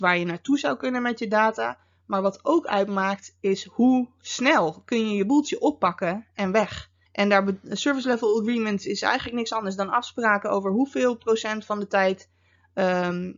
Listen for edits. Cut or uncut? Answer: cut